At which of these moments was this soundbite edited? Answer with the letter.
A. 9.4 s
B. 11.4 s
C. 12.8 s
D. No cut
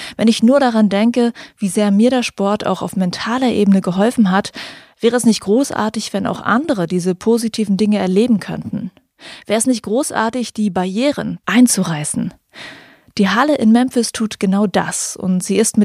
B